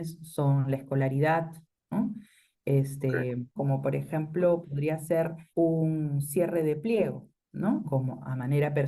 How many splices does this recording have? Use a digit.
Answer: 3